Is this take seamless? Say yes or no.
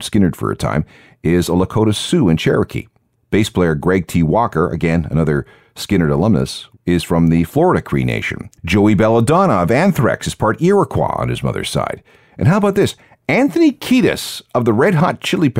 no